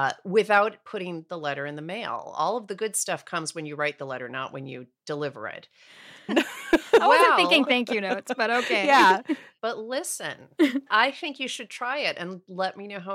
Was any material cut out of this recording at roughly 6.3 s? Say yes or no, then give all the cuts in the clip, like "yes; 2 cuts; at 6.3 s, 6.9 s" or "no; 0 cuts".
yes; 2 cuts; at 6.3 s, 10.9 s